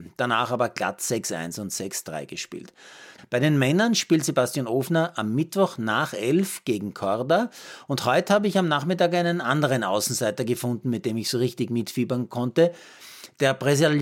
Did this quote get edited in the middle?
yes; 1 cut; at 3.2 s

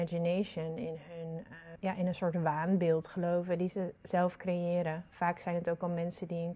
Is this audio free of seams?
no; 1 cut; at 1.8 s

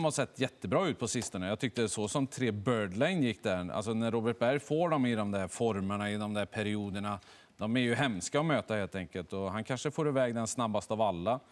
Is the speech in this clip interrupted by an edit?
no; 0 cuts

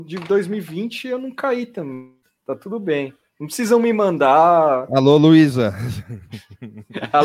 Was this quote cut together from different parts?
no; 0 cuts

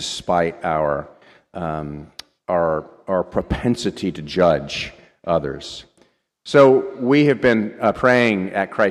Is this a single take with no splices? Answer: yes; 0 cuts

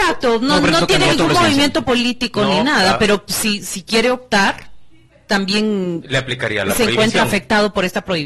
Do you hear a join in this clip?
no; 0 cuts

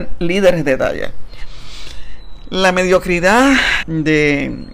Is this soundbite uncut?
no; 1 cut; at 3.8 s

